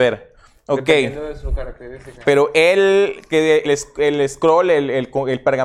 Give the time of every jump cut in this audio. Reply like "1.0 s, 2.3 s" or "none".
2.2 s, 3.6 s